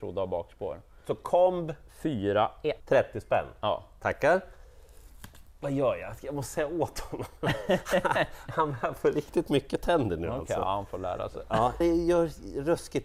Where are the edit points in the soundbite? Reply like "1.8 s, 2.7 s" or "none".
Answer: 2.8 s, 11.8 s